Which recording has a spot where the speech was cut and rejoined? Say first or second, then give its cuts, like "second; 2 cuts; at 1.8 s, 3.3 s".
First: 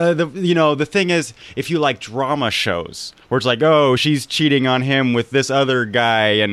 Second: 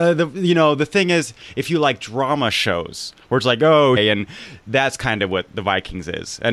second; 1 cut; at 4.0 s